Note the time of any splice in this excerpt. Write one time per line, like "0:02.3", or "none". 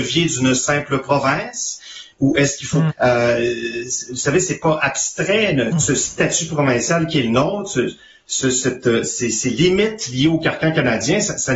0:02.9
0:05.7